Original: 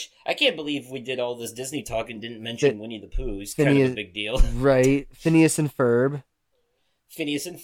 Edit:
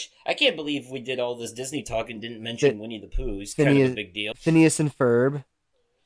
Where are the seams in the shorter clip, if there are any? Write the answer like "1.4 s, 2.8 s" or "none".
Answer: 4.3 s